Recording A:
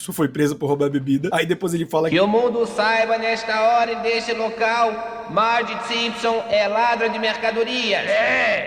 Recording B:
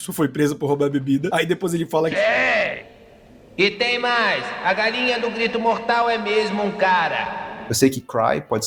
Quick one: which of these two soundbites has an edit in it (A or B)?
B